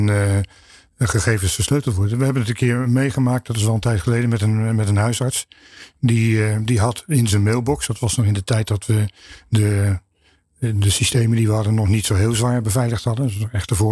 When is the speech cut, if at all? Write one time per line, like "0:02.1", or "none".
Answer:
none